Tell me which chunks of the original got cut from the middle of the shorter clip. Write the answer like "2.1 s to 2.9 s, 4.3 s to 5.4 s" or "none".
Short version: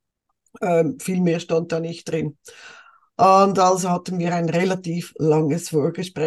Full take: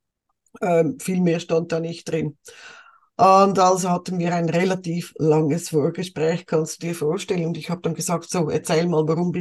none